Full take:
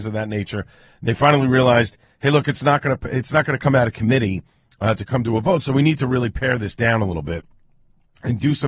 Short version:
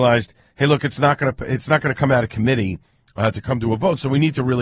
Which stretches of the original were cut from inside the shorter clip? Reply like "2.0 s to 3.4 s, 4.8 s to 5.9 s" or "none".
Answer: none